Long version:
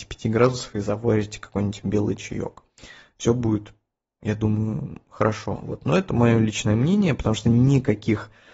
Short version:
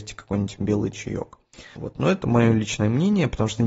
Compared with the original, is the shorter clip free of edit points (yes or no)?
no